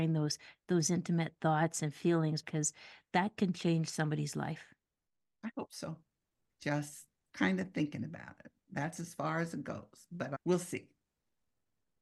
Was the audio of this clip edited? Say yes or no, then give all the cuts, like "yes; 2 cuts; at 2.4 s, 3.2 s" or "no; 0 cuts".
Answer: yes; 2 cuts; at 2.4 s, 6.5 s